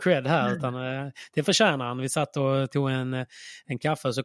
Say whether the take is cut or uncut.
uncut